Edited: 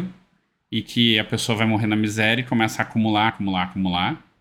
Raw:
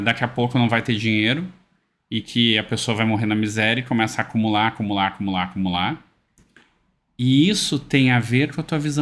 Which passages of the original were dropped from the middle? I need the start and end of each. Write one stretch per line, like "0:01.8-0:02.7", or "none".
0:04.7-0:05.1